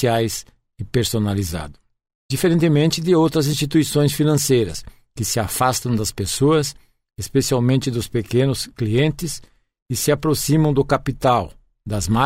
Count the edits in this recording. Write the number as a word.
zero